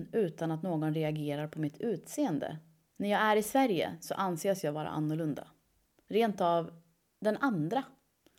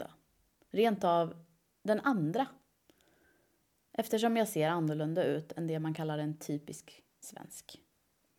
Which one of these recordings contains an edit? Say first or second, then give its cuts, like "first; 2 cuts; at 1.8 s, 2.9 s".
first; 1 cut; at 2.9 s